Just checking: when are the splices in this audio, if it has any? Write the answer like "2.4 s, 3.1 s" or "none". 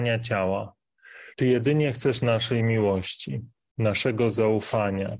1.3 s